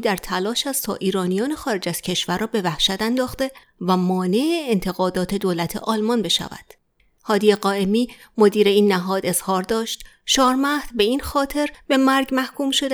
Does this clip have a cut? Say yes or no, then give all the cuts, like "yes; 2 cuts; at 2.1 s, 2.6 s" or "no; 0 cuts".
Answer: yes; 1 cut; at 7.2 s